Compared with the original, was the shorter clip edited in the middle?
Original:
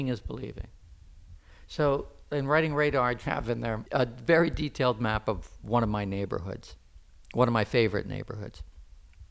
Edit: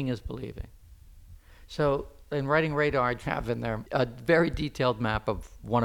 no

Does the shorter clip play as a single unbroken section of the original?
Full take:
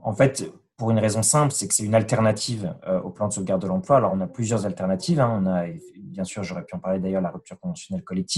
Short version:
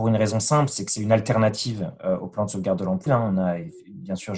no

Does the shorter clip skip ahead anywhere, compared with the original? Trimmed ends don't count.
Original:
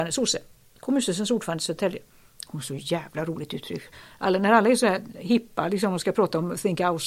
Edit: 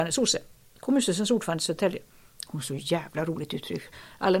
no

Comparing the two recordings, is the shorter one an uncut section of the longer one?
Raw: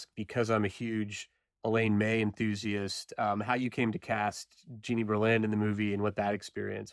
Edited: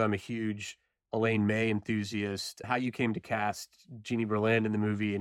no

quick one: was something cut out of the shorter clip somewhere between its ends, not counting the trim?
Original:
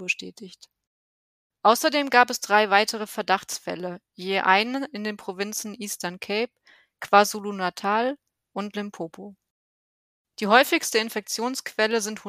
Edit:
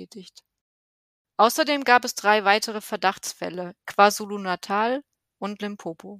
yes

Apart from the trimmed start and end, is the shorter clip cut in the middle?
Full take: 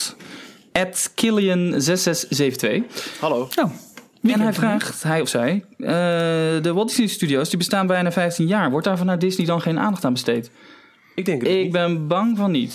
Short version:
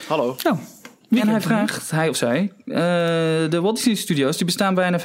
no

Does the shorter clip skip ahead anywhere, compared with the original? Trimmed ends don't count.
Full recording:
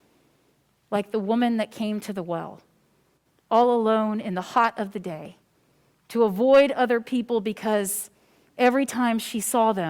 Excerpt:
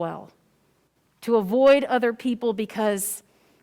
yes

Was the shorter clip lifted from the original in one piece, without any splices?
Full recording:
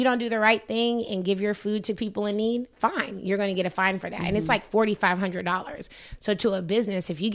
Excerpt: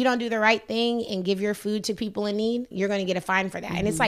no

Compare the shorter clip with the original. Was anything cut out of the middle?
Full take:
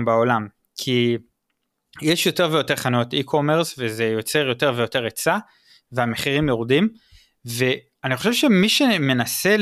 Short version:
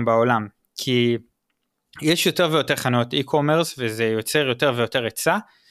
no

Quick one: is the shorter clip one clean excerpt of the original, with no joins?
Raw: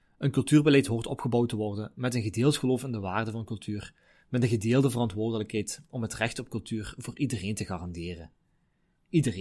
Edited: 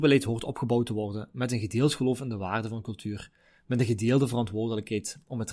yes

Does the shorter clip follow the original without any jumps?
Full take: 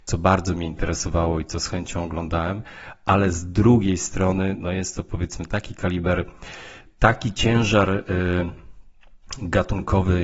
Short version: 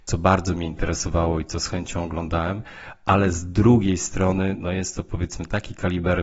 yes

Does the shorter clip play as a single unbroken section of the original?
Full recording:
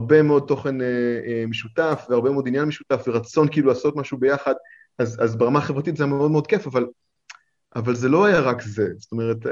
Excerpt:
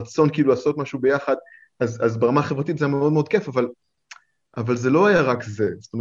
yes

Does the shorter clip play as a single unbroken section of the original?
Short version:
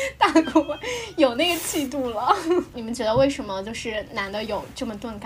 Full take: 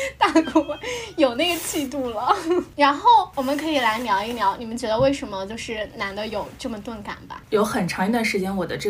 no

